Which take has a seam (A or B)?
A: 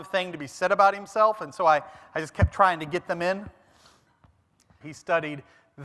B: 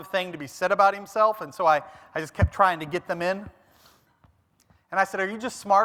A